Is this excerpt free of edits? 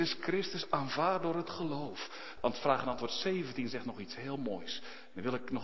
no; 1 cut; at 2.4 s

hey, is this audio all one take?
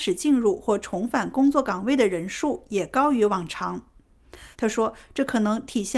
no; 1 cut; at 4.5 s

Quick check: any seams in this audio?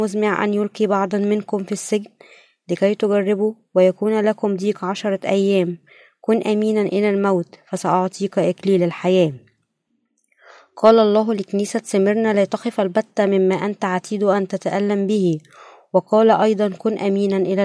no; 0 cuts

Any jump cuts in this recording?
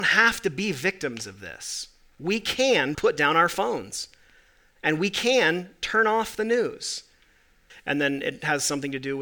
yes; 2 cuts; at 2.9 s, 7.7 s

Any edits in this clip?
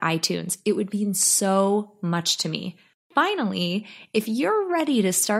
no; 0 cuts

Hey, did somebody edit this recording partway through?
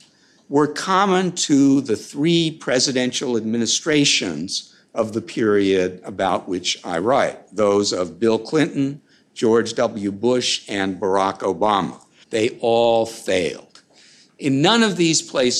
yes; 1 cut; at 12.2 s

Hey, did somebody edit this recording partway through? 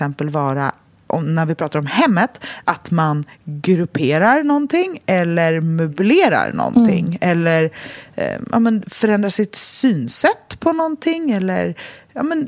no; 0 cuts

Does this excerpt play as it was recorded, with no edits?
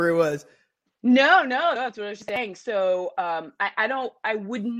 no; 1 cut; at 1.8 s

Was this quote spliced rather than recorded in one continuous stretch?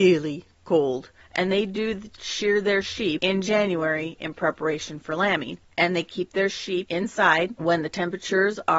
no; 0 cuts

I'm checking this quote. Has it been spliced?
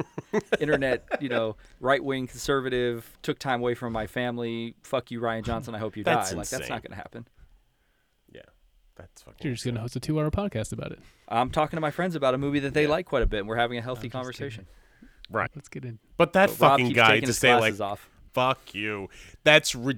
yes; 2 cuts; at 15.5 s, 18.3 s

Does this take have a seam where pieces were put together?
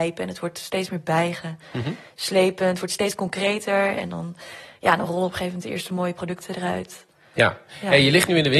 no; 0 cuts

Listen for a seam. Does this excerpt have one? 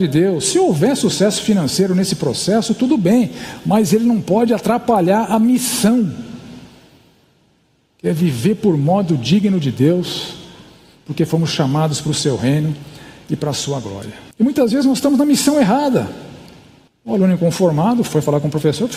yes; 2 cuts; at 14.3 s, 16.9 s

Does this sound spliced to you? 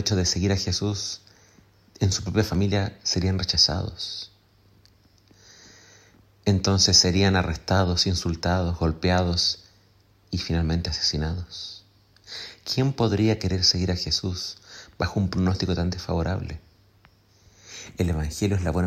no; 0 cuts

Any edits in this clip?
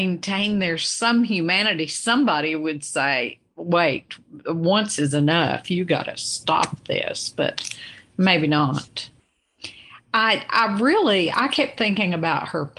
no; 0 cuts

